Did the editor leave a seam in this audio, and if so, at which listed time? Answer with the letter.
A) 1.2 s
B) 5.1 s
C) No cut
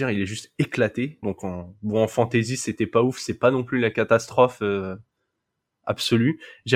A